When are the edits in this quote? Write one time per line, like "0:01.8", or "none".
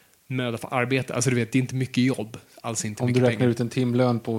none

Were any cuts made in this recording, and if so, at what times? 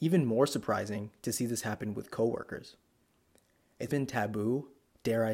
0:03.9

